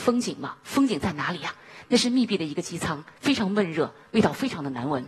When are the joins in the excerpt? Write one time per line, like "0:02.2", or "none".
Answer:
none